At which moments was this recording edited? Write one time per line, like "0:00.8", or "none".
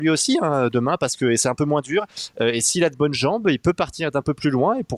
none

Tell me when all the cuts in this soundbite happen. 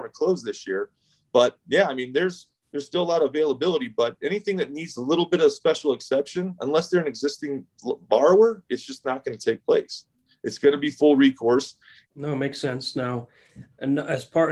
0:12.0

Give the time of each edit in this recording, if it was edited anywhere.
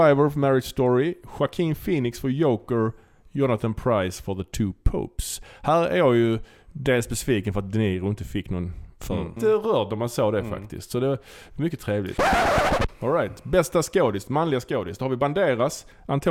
0:09.4

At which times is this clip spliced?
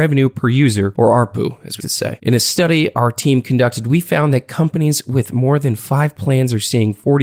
0:01.8

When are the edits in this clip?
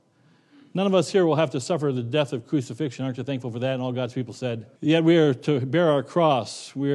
0:04.7

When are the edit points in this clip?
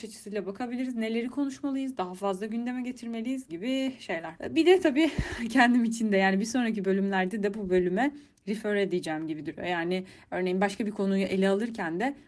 0:03.5

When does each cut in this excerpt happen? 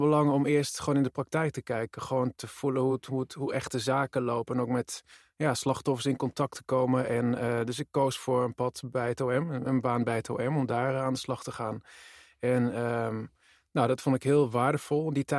none

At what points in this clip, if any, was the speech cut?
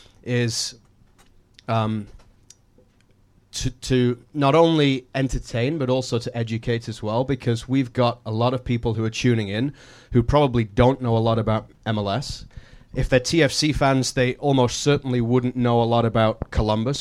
none

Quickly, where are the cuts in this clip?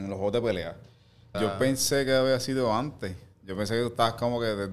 0:01.3

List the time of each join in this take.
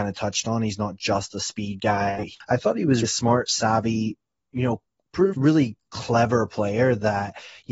0:03.0
0:05.3

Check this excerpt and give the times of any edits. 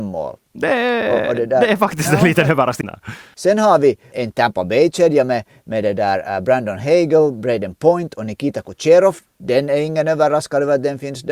0:02.8
0:04.1

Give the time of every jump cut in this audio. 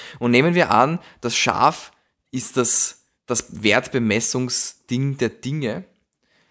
none

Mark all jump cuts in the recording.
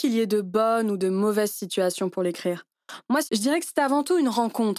0:03.3

